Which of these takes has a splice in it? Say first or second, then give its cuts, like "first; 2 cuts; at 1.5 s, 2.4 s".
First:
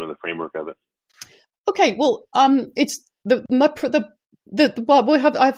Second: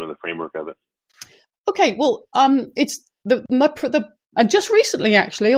second; 1 cut; at 4.3 s